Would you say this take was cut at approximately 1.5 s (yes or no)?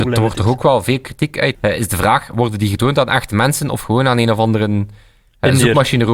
yes